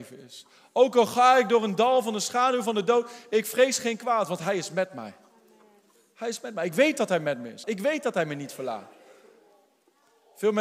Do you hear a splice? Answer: yes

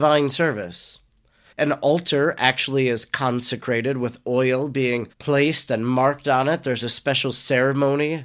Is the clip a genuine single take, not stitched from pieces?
no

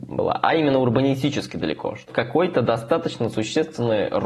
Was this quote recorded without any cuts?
no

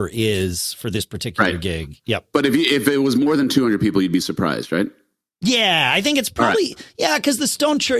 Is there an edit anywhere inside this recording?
no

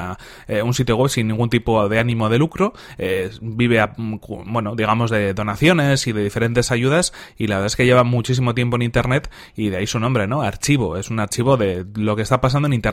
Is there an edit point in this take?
no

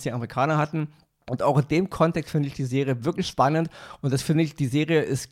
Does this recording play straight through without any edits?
yes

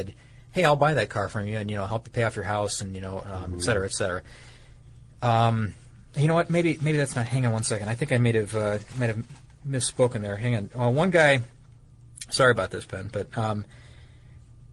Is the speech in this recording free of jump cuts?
yes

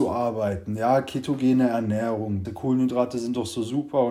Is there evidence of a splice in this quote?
yes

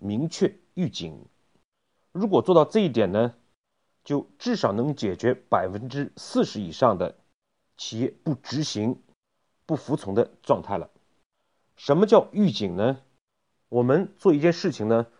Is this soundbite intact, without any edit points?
no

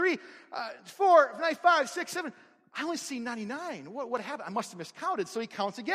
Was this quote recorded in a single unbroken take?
yes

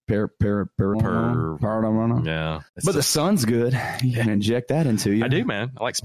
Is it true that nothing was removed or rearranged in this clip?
no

